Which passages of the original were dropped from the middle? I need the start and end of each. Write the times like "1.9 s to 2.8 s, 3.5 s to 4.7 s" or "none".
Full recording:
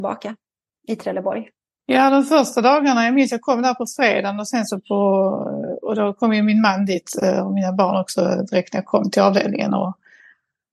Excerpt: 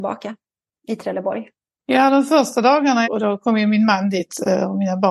3.0 s to 5.8 s